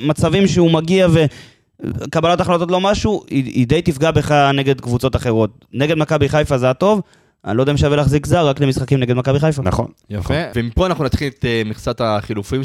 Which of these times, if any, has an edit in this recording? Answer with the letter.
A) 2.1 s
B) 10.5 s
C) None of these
B